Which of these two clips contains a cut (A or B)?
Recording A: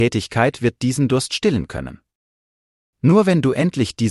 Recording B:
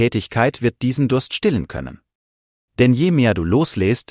B